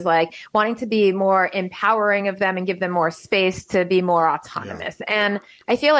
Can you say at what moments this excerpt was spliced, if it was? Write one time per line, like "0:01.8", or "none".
none

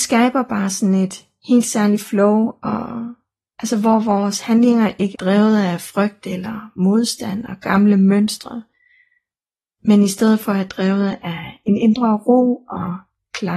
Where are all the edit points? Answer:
0:05.1

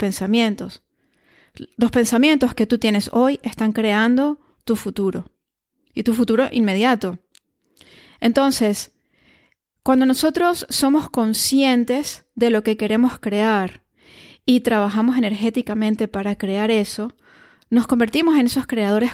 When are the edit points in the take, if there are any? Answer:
none

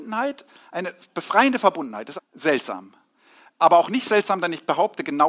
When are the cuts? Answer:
0:02.2

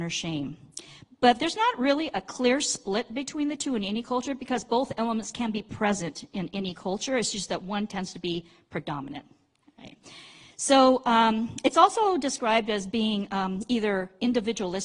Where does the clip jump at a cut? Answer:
0:09.6

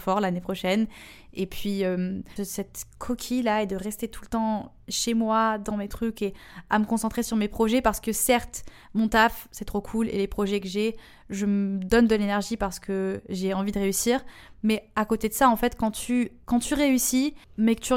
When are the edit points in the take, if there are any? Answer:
0:02.4

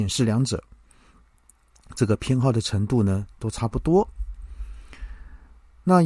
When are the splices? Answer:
none

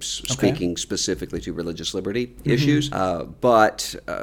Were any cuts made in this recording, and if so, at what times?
0:02.9

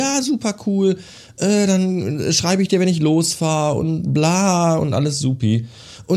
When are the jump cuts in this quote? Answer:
none

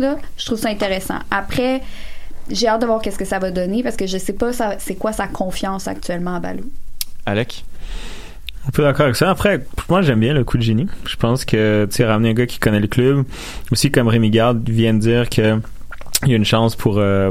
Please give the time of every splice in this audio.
none

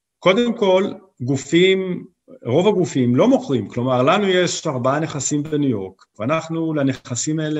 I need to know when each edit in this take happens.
0:06.1

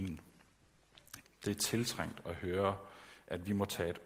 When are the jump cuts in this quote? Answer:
0:01.2

